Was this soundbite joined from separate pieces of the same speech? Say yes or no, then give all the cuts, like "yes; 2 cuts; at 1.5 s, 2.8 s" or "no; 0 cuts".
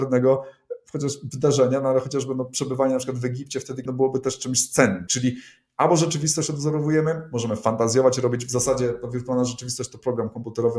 yes; 2 cuts; at 3.9 s, 5.1 s